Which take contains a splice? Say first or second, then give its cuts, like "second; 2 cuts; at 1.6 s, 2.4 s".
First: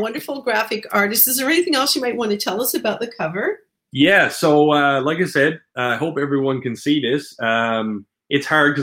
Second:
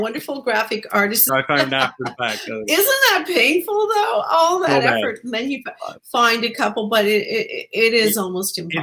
second; 1 cut; at 1.3 s